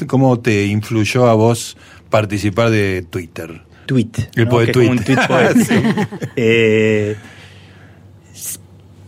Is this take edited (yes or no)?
yes